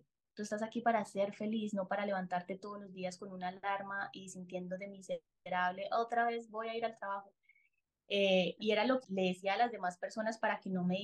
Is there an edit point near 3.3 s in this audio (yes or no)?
no